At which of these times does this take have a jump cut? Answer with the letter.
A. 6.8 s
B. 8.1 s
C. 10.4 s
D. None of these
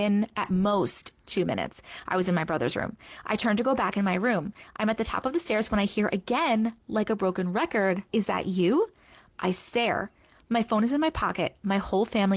B